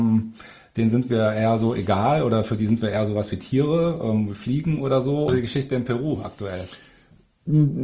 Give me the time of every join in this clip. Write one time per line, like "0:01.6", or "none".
0:05.3